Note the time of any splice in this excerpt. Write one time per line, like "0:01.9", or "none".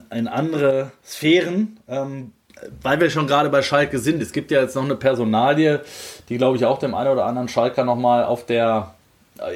none

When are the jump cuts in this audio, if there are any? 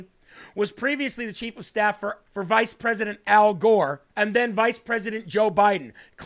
0:02.3
0:04.1

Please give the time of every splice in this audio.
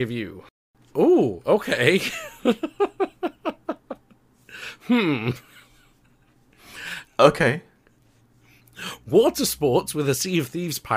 0:07.1

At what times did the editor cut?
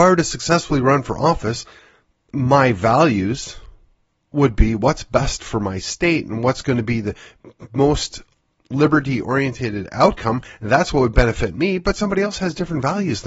none

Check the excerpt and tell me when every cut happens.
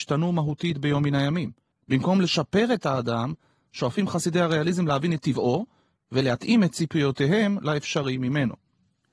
0:01.7

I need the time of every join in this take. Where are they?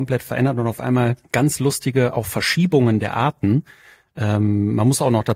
0:01.2

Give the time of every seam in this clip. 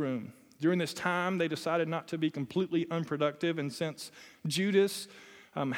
none

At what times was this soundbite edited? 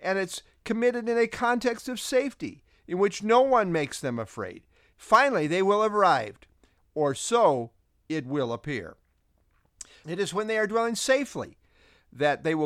0:04.9
0:06.8
0:10.0

